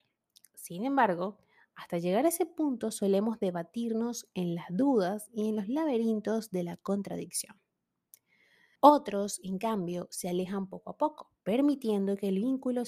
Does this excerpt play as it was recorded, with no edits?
no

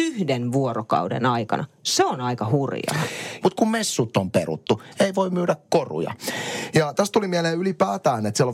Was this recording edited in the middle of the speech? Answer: yes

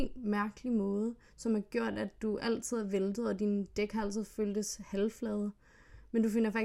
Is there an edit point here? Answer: no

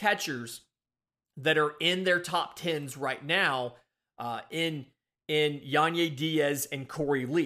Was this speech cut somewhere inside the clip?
no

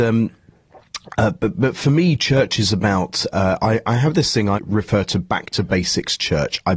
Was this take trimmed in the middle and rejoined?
yes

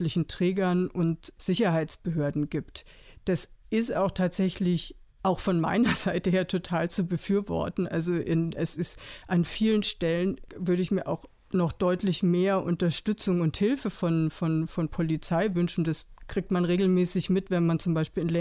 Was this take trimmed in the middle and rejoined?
no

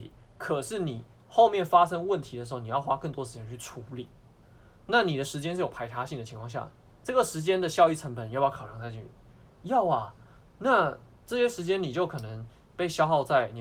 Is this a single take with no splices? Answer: yes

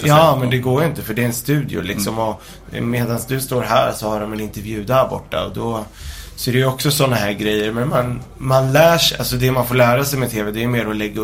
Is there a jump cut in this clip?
no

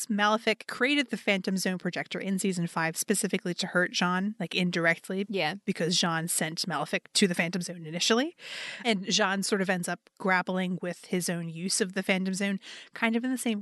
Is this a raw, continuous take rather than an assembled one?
yes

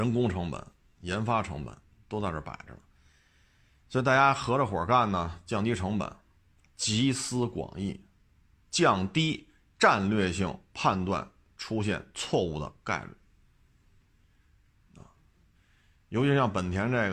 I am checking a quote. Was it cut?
no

